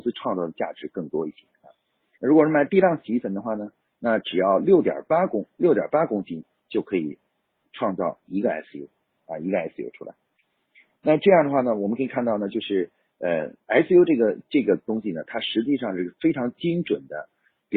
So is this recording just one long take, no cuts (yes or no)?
no